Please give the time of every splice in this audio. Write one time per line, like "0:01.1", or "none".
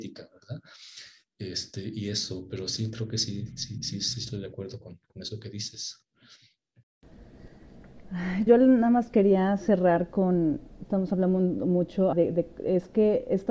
0:08.5
0:10.9
0:12.1